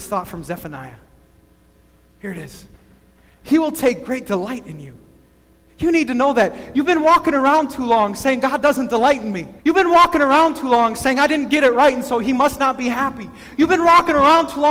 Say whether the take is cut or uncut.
cut